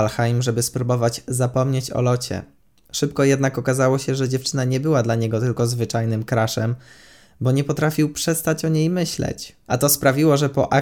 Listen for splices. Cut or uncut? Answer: uncut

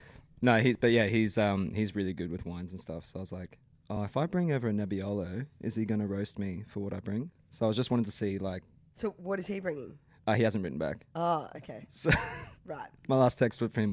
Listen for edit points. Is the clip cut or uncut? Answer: uncut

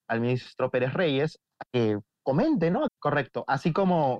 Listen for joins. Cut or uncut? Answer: cut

